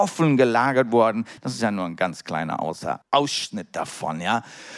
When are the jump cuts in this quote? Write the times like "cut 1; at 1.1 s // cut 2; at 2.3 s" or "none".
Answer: cut 1; at 1.4 s // cut 2; at 3.0 s

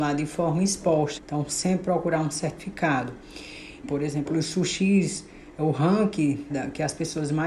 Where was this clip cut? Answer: cut 1; at 1.2 s // cut 2; at 3.8 s // cut 3; at 6.5 s

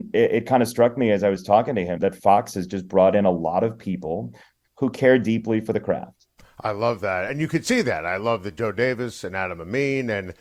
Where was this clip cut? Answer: cut 1; at 2.0 s // cut 2; at 4.6 s

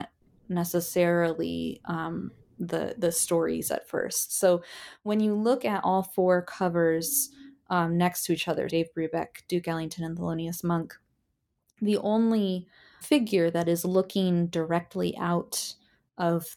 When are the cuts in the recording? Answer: cut 1; at 8.7 s // cut 2; at 13.0 s

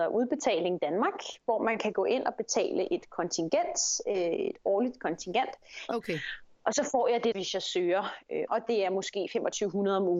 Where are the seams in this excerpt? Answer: cut 1; at 5.9 s // cut 2; at 7.3 s // cut 3; at 8.5 s

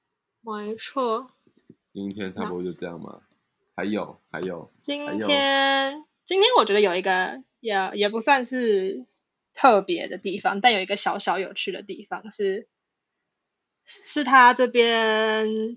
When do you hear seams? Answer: none

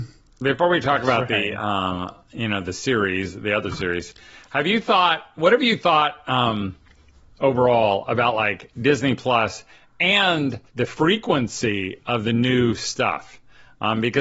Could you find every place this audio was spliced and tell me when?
cut 1; at 10.7 s

